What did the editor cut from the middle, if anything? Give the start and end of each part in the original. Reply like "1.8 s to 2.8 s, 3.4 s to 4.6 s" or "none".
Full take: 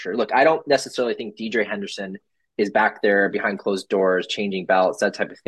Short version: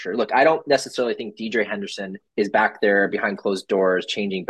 2.3 s to 2.5 s